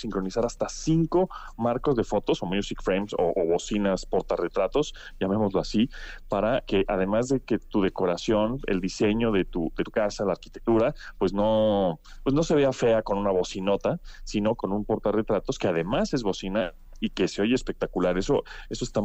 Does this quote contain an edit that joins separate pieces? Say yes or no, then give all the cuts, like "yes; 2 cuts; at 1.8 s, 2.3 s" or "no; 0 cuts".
no; 0 cuts